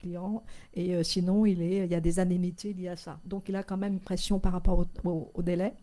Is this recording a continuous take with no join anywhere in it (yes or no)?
yes